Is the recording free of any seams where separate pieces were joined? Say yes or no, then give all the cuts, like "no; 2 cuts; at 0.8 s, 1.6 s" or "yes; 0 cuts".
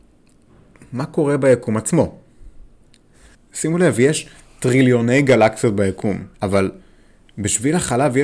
no; 2 cuts; at 3.3 s, 6.3 s